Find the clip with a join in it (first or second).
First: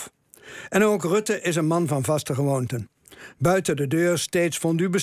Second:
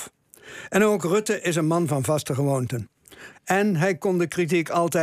second